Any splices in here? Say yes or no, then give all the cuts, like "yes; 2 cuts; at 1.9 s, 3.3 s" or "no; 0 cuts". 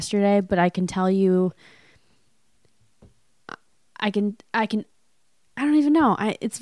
no; 0 cuts